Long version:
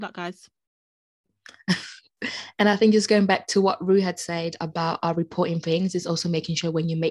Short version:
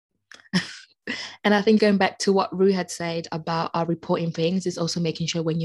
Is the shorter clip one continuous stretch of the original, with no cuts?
no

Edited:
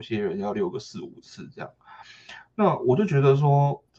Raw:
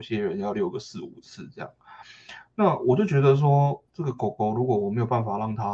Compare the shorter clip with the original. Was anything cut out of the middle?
no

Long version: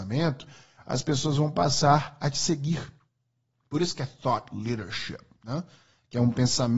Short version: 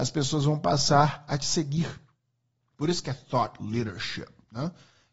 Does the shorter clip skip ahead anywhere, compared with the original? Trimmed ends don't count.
no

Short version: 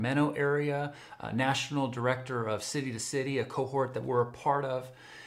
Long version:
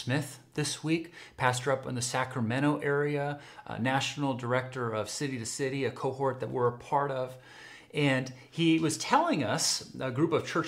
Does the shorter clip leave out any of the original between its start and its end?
no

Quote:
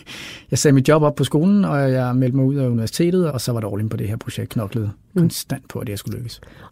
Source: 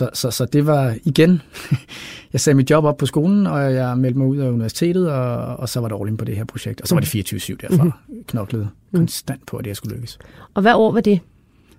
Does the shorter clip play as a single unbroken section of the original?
no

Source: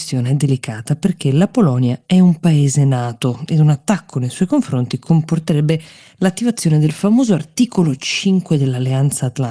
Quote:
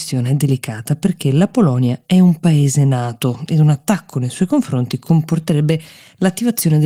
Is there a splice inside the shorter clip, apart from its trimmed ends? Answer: no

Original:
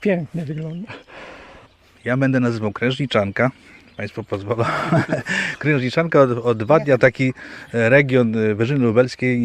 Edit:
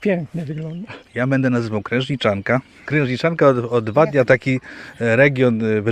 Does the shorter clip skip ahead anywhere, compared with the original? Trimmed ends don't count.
yes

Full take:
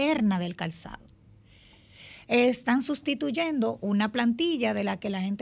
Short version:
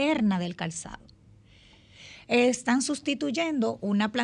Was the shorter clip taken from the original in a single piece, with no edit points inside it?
yes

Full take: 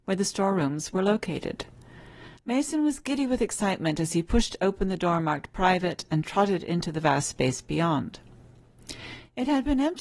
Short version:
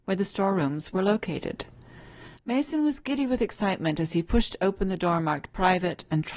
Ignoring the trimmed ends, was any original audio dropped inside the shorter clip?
no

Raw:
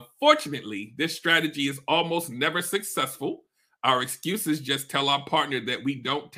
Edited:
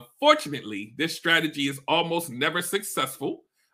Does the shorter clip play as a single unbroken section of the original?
yes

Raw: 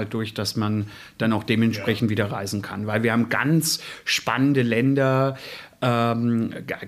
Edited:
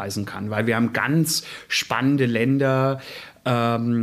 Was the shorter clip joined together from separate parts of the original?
no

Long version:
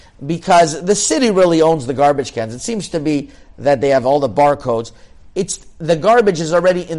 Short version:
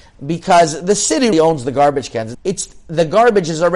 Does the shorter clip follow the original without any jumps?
no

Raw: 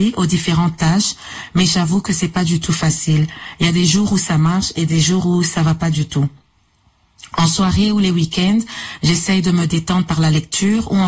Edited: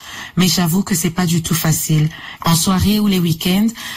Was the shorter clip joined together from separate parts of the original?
yes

